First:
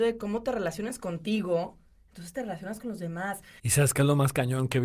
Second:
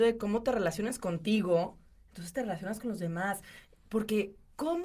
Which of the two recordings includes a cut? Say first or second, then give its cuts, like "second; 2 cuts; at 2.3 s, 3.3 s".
first; 1 cut; at 3.6 s